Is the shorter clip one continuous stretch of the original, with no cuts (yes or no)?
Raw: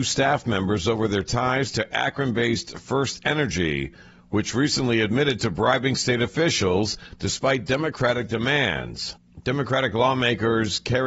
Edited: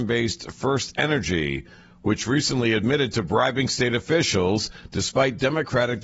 yes